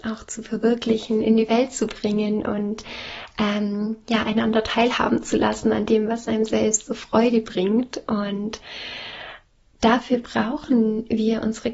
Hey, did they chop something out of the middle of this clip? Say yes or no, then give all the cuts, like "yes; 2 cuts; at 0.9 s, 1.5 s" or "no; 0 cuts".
no; 0 cuts